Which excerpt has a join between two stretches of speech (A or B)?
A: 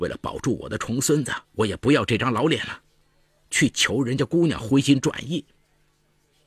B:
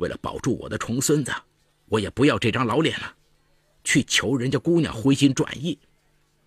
A